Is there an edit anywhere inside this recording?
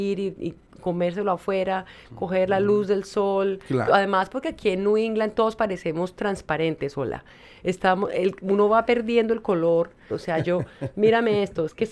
yes; 2 cuts; at 3.9 s, 10.1 s

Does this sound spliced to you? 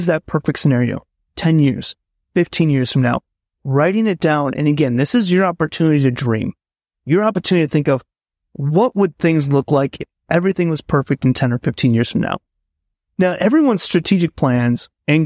no; 0 cuts

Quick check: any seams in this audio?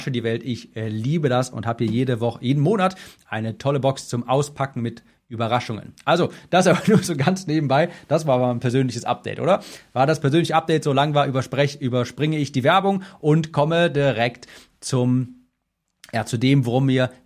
no; 0 cuts

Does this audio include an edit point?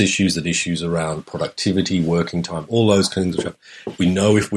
no; 0 cuts

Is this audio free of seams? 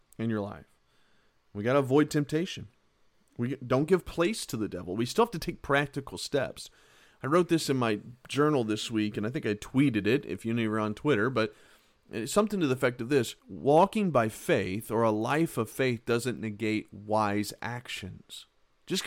no; 1 cut; at 13.4 s

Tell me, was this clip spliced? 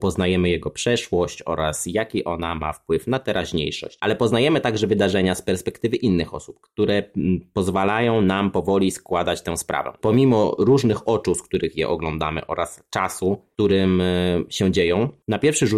no; 0 cuts

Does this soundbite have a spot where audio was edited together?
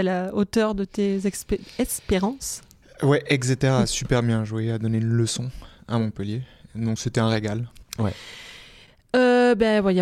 yes; 1 cut; at 7.8 s

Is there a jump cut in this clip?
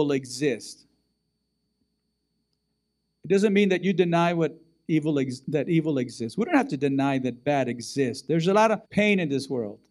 yes; 1 cut; at 8.8 s

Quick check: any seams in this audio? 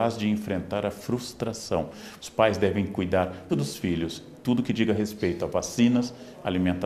yes; 2 cuts; at 2.2 s, 3.5 s

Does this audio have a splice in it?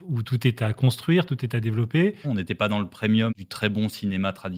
yes; 2 cuts; at 2.2 s, 3.3 s

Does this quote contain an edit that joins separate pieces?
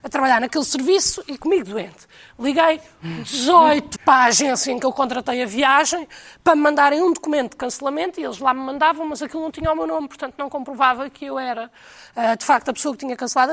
yes; 1 cut; at 4.0 s

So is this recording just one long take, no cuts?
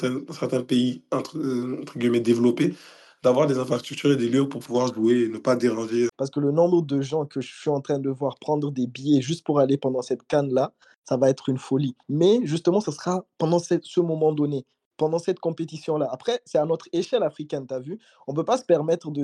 no; 1 cut; at 6.1 s

